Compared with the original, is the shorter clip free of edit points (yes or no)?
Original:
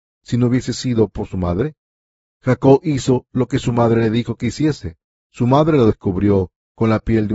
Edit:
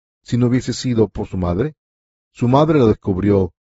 no